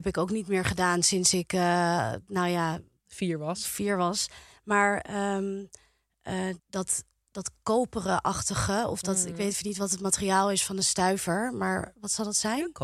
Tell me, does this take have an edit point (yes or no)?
yes